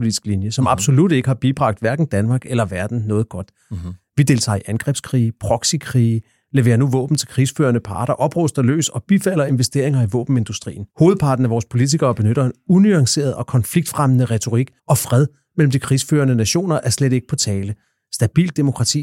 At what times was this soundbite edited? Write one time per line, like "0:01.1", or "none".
0:10.9
0:14.8

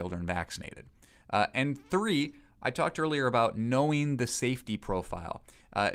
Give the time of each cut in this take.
none

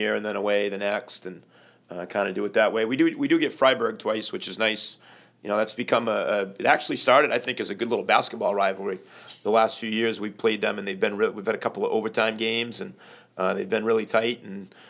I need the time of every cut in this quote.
none

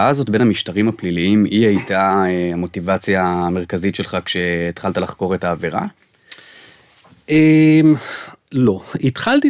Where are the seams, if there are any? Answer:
none

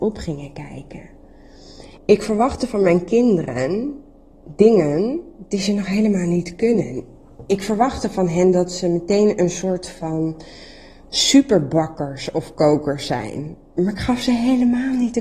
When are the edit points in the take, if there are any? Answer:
0:02.0

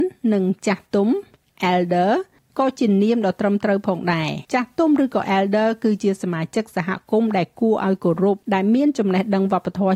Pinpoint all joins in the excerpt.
0:04.4
0:08.4

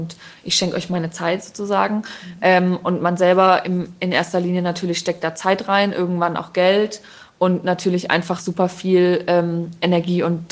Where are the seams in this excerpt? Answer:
none

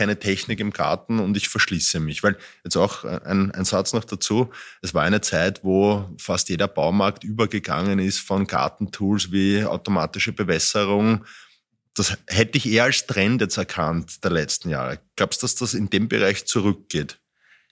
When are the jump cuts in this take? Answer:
none

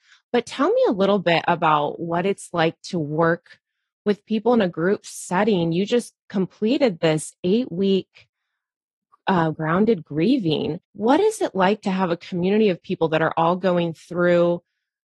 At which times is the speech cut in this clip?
0:09.5
0:10.8

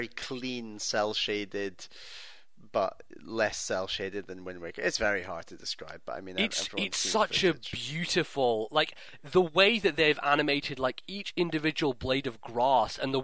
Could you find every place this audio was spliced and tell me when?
none

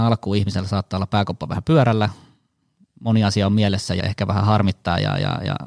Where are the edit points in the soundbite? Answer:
0:04.0

